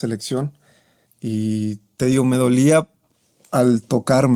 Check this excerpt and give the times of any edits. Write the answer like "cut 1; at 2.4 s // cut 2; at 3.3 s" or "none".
cut 1; at 1.1 s